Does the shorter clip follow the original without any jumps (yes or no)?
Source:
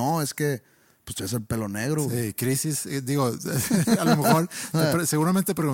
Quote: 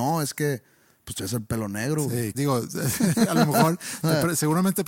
no